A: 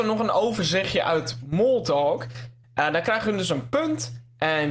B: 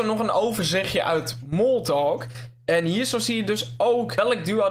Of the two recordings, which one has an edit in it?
A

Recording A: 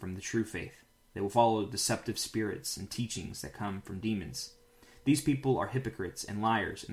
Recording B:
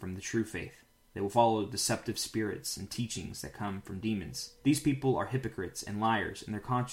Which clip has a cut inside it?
B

